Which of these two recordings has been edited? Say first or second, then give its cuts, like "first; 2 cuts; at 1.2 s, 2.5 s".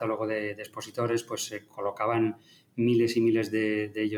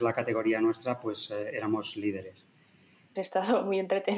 second; 1 cut; at 3.2 s